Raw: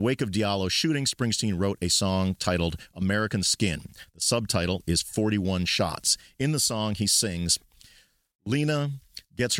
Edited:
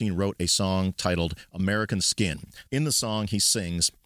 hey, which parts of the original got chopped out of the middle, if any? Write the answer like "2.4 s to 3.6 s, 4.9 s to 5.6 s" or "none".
4.1 s to 6.3 s